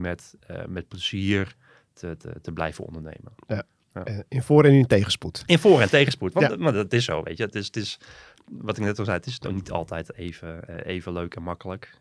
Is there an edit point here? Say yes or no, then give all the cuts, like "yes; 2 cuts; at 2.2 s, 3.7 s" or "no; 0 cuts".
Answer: no; 0 cuts